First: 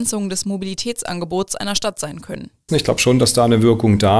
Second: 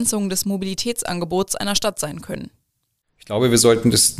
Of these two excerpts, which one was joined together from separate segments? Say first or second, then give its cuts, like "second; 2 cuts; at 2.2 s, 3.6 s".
first; 1 cut; at 2.7 s